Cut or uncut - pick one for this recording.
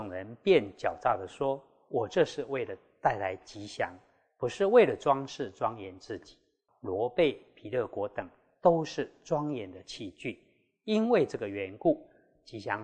cut